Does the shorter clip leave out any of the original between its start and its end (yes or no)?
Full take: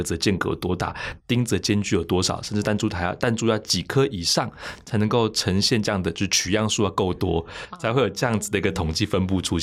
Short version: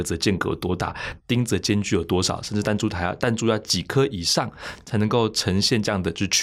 no